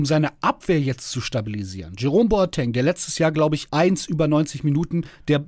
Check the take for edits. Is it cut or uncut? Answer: cut